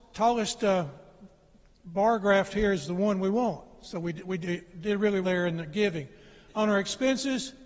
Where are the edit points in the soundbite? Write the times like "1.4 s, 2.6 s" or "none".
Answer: 5.2 s